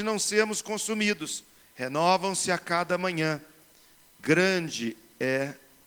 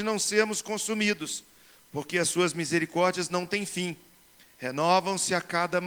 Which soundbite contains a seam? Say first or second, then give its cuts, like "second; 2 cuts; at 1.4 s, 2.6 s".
first; 1 cut; at 1.6 s